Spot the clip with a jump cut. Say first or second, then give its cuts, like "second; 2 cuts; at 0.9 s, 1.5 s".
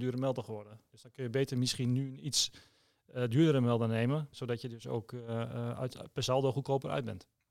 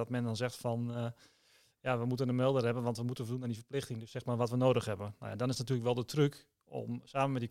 first; 1 cut; at 4.3 s